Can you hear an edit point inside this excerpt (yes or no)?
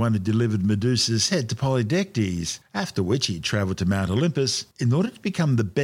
no